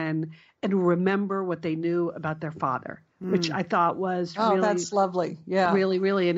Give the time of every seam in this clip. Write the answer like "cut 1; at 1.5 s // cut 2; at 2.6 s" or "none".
none